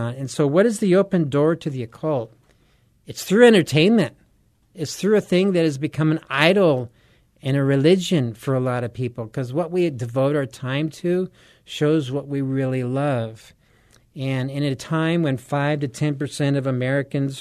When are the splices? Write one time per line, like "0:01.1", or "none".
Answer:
none